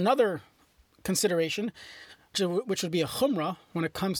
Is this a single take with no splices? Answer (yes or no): no